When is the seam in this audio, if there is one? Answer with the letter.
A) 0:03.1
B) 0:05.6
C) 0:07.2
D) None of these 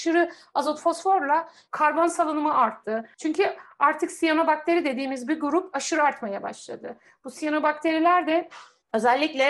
A